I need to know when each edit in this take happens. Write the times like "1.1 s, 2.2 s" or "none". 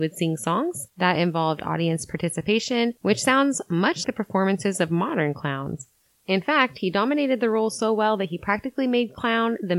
4.0 s, 6.1 s